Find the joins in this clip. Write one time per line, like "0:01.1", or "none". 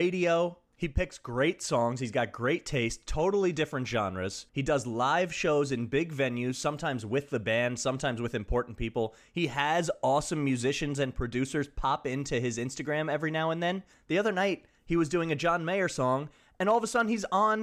0:04.5

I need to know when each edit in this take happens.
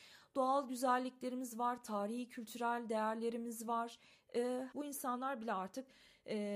0:04.7

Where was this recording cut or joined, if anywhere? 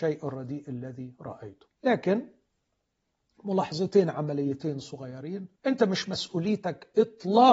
0:01.7
0:05.6

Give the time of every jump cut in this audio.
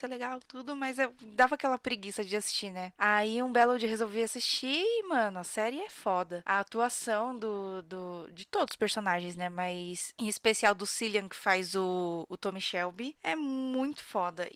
none

